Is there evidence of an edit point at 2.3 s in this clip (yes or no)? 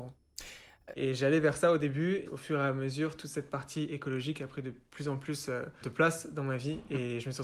yes